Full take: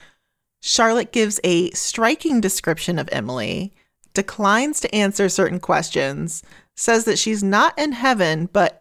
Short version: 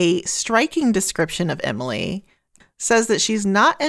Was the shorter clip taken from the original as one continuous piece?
no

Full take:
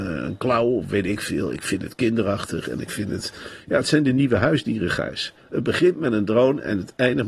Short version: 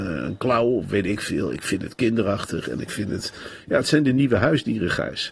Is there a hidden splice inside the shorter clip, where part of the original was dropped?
no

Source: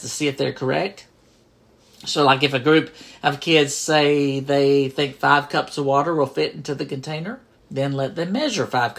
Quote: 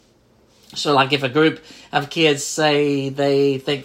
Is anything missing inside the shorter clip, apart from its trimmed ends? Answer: no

